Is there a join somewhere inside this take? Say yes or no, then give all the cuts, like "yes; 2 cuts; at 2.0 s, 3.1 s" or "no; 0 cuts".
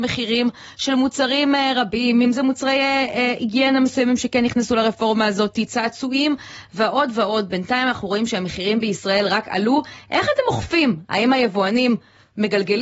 yes; 1 cut; at 2.2 s